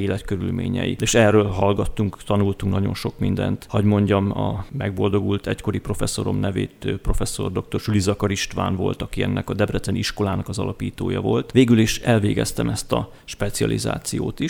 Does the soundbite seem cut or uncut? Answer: uncut